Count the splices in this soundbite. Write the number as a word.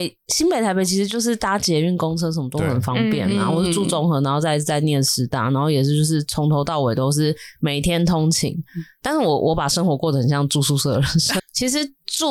one